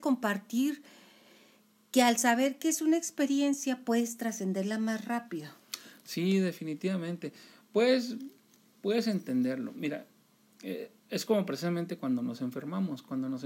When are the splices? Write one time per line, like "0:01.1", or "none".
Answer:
0:11.0